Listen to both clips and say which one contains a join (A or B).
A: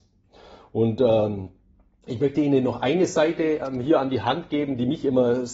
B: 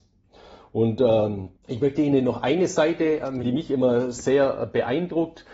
B